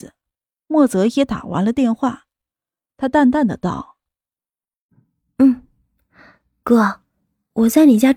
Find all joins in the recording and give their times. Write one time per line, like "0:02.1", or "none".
0:02.9